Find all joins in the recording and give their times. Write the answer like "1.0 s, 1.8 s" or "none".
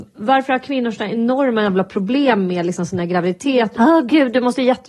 3.7 s